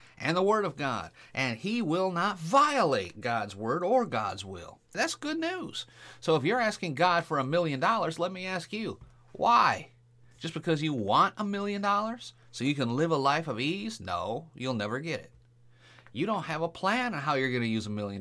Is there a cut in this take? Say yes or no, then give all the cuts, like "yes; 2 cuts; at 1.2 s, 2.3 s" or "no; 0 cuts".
yes; 1 cut; at 4.9 s